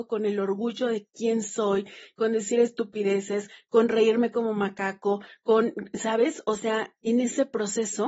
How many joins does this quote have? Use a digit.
1